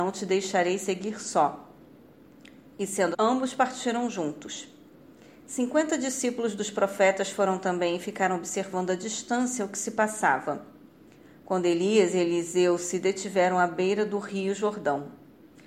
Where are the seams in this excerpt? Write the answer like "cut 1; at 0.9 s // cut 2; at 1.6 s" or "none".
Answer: cut 1; at 3.1 s